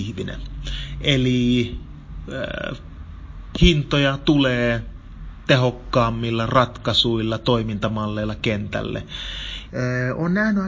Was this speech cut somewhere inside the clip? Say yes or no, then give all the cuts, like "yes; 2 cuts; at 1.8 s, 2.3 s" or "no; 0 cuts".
yes; 2 cuts; at 3.5 s, 9.7 s